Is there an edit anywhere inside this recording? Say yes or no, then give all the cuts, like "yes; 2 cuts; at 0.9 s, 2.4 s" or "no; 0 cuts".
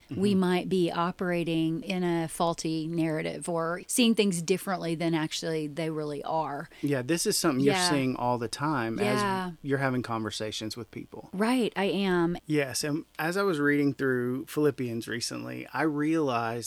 yes; 1 cut; at 12.4 s